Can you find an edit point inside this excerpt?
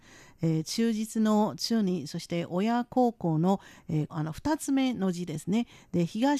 yes; 1 cut; at 4.1 s

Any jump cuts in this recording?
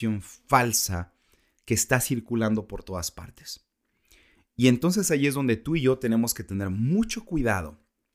no; 0 cuts

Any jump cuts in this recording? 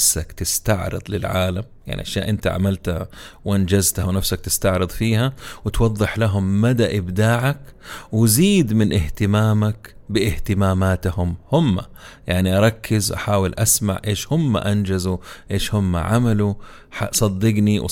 yes; 1 cut; at 1.8 s

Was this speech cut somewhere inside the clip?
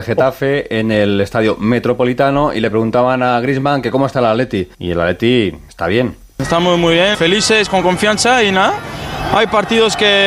yes; 2 cuts; at 4.7 s, 7.1 s

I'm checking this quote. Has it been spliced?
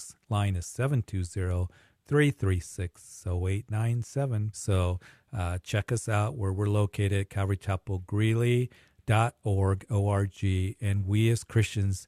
yes; 1 cut; at 4.5 s

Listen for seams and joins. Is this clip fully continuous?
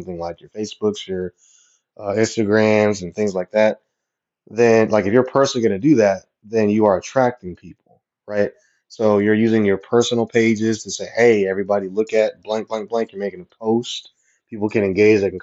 yes; 0 cuts

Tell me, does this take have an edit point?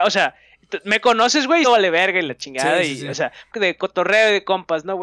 yes; 2 cuts; at 1.6 s, 3.5 s

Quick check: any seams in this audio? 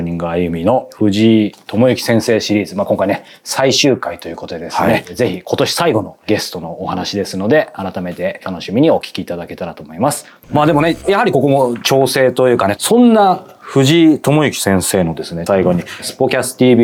yes; 3 cuts; at 10.4 s, 12.8 s, 15.5 s

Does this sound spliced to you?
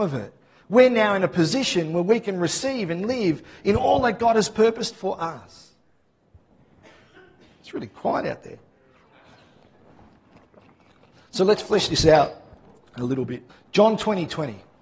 yes; 1 cut; at 13.5 s

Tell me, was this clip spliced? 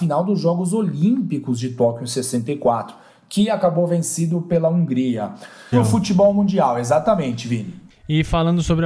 yes; 1 cut; at 5.7 s

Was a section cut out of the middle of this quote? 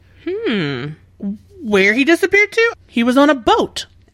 yes; 1 cut; at 2.7 s

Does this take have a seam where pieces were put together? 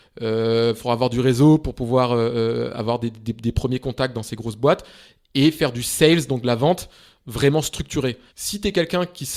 yes; 1 cut; at 8.3 s

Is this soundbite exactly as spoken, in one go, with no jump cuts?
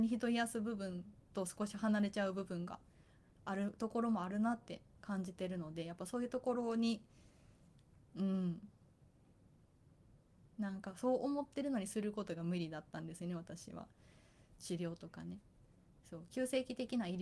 no; 1 cut; at 14.6 s

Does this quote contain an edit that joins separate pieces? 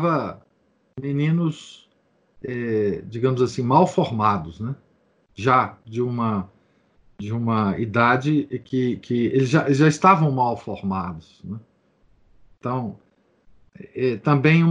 no; 0 cuts

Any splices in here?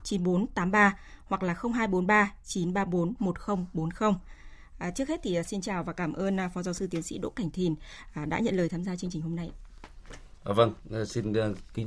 no; 0 cuts

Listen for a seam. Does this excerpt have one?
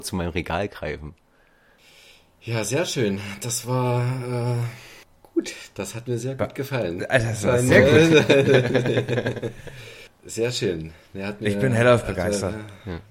no; 0 cuts

